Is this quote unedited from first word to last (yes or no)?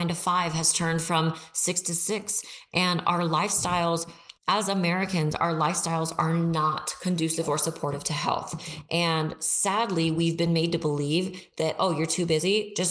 no